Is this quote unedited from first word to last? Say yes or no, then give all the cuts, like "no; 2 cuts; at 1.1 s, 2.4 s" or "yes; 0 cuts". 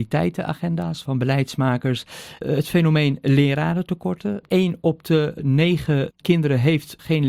yes; 0 cuts